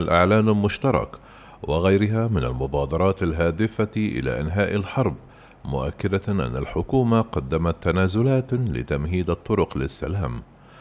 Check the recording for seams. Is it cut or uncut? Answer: uncut